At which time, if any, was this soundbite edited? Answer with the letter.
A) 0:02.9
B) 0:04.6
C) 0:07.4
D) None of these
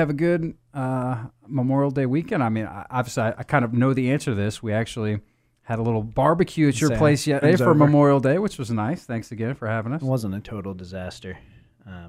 C